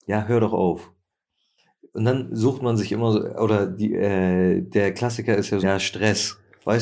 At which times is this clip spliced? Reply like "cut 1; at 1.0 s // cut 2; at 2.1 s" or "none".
cut 1; at 5.6 s